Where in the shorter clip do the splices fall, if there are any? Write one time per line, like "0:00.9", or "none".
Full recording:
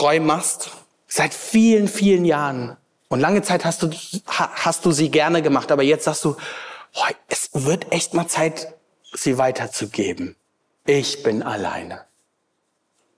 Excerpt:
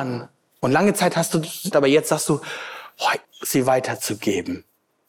0:01.7
0:03.2